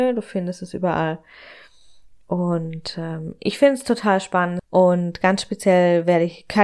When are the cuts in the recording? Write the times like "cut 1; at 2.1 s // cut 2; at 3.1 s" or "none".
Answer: cut 1; at 4.6 s